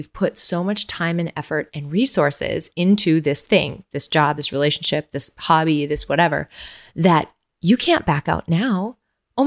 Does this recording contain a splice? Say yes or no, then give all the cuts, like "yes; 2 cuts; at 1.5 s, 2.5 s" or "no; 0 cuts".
no; 0 cuts